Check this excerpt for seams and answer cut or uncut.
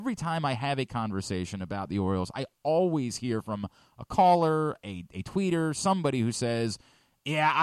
uncut